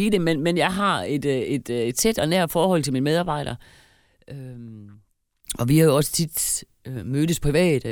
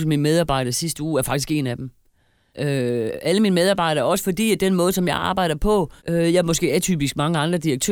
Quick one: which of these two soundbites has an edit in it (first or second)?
second